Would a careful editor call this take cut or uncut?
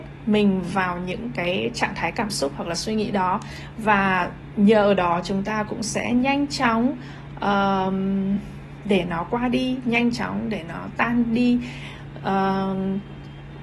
uncut